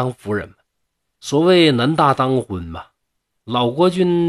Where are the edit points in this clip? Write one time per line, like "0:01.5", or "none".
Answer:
0:01.2